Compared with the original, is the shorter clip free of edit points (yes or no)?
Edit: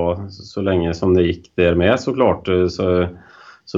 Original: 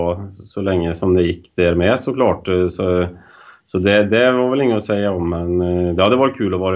yes